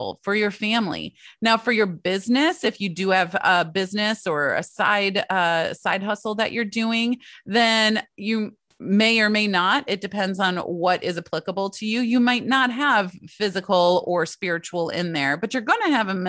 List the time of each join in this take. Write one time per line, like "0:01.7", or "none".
none

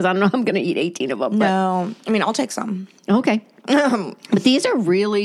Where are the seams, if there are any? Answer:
none

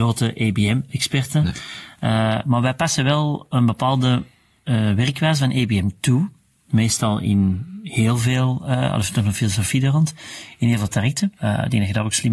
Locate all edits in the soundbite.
0:11.4

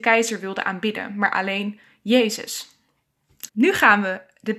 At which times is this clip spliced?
0:03.5

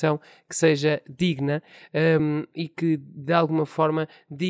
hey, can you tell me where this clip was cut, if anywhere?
none

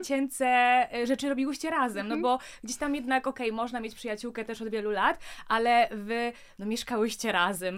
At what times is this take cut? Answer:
0:04.7

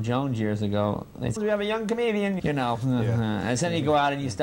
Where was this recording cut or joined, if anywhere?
0:01.4
0:02.4

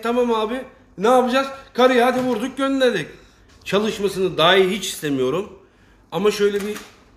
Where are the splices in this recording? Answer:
0:03.5

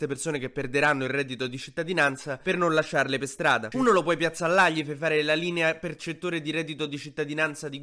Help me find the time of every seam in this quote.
0:03.7

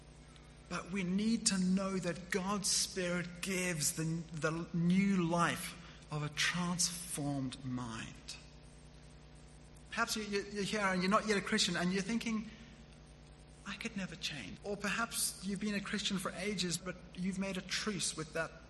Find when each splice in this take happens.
0:09.9
0:14.6
0:16.8

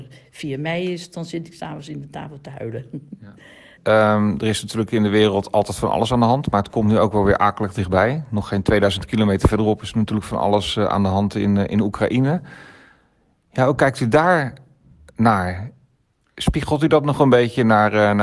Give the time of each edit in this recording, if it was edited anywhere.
0:03.8

